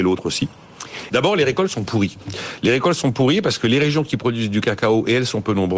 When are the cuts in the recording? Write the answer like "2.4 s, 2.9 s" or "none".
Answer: 1.1 s

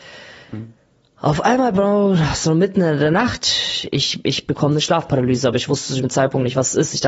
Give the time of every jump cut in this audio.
none

